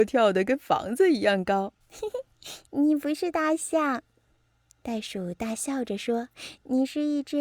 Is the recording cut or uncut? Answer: cut